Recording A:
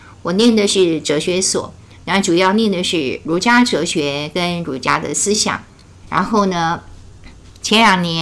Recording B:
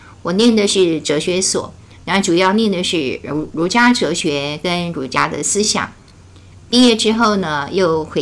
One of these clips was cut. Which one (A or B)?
A